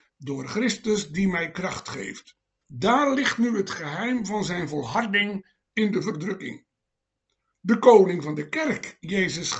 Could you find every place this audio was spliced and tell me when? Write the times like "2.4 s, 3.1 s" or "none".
2.6 s